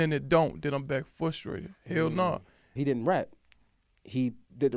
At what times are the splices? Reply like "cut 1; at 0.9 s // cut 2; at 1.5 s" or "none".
cut 1; at 2.8 s